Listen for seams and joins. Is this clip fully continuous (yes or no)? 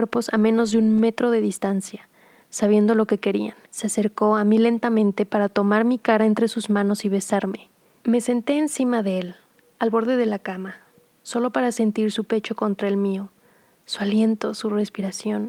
no